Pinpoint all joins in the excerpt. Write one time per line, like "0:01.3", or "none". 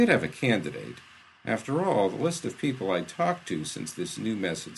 none

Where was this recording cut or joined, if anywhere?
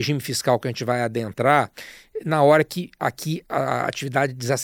0:03.4

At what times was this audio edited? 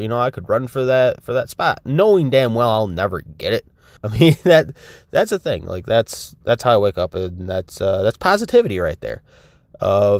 0:04.0

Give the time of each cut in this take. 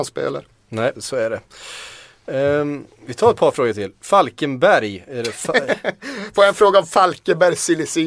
0:00.9

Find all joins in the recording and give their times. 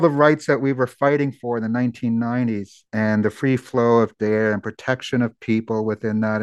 0:02.9

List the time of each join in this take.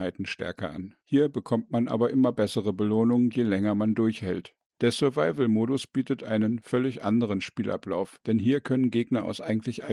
0:01.0

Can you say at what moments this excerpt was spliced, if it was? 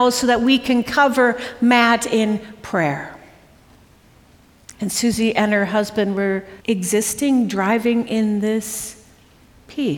0:04.7
0:06.6

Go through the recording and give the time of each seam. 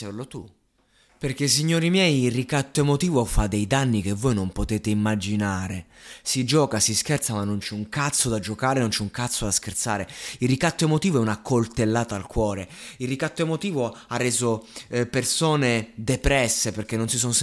none

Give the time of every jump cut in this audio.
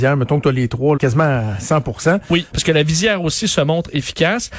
0:01.0
0:02.5

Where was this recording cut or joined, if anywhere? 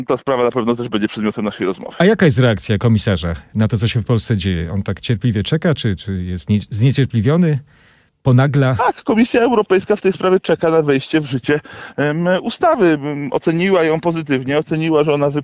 none

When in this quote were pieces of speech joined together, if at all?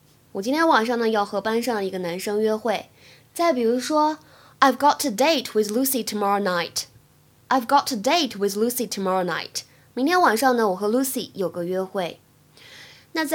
none

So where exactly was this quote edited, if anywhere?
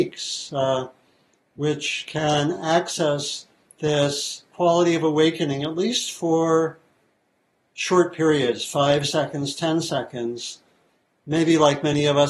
none

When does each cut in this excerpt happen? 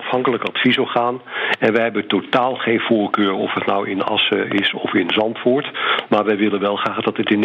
none

